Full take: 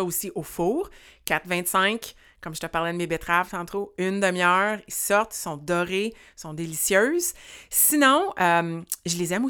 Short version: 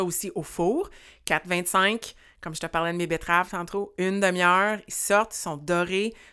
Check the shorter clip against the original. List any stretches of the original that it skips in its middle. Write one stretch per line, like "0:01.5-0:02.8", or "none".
none